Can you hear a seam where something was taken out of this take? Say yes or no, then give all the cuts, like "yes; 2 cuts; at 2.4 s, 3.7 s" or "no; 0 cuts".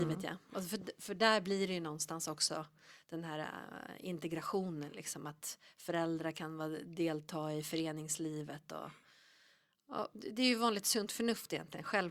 no; 0 cuts